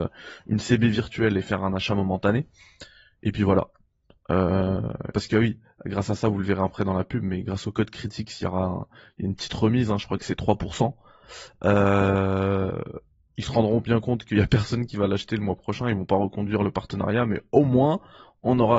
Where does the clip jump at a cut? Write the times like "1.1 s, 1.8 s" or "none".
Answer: 5.1 s